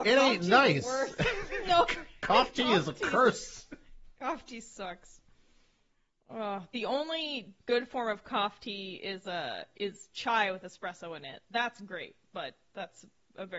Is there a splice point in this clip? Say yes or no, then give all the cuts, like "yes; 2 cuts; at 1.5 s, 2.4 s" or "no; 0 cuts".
no; 0 cuts